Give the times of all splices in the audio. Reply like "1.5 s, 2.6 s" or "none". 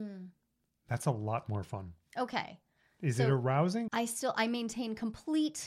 3.9 s